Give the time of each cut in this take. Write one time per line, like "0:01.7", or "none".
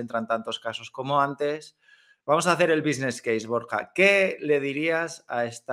none